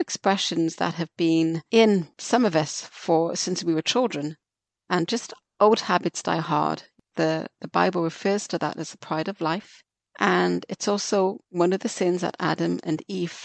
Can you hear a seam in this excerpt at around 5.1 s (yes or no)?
yes